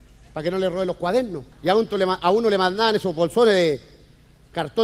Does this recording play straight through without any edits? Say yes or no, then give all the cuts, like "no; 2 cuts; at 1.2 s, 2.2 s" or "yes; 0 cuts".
no; 1 cut; at 1.5 s